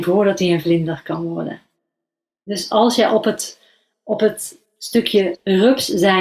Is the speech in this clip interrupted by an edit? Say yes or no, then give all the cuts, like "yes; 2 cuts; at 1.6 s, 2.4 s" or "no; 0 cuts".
no; 0 cuts